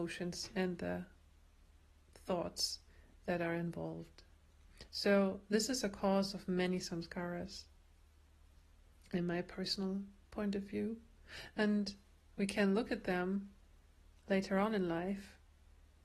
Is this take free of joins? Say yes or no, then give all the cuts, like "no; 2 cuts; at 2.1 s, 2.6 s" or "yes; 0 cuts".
yes; 0 cuts